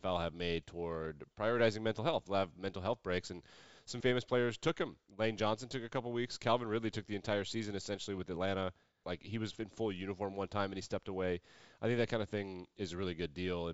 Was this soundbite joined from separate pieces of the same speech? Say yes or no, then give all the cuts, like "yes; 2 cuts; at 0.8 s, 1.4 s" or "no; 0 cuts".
yes; 3 cuts; at 2.3 s, 4.0 s, 9.0 s